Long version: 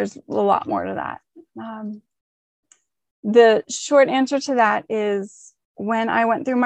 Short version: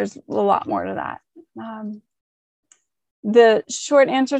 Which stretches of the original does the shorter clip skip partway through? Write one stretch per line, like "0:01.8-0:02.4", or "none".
none